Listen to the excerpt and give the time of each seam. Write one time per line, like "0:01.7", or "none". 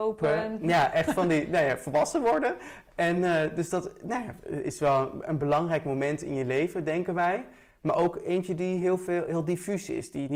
none